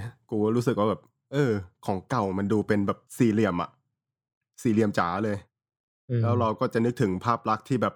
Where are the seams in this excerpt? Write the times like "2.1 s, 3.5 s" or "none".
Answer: 3.1 s